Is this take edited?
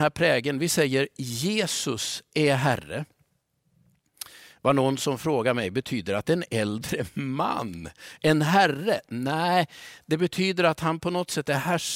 no; 0 cuts

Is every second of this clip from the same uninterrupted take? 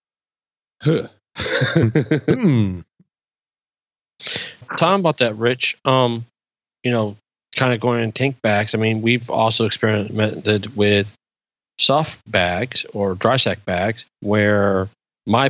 no; 2 cuts; at 4.6 s, 14.1 s

